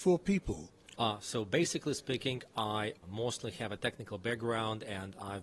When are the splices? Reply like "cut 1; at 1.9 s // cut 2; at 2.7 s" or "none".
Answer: cut 1; at 0.9 s // cut 2; at 3.0 s